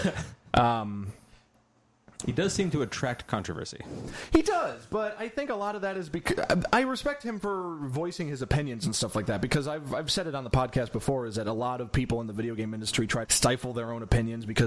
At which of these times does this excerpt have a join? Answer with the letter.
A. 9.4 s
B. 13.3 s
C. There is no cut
B